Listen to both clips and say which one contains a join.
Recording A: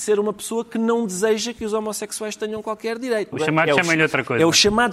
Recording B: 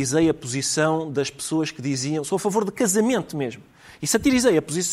A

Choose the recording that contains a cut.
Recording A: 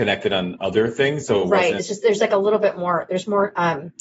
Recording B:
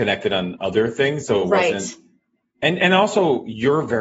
A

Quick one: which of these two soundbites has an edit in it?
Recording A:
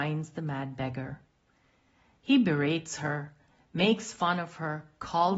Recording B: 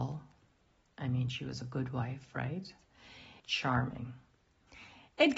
B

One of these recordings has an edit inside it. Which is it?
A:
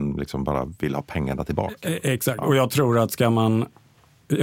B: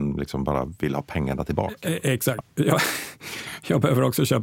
B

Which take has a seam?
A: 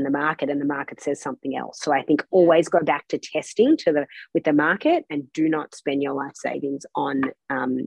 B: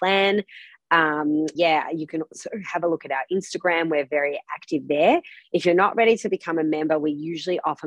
B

